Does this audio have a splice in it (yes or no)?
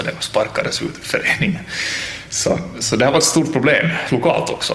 no